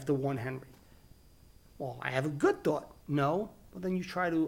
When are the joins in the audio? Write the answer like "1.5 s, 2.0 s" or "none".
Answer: 3.0 s